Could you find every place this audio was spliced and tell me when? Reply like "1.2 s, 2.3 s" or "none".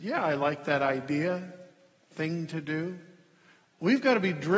none